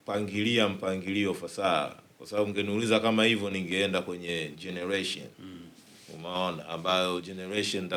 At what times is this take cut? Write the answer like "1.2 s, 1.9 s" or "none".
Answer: 5.3 s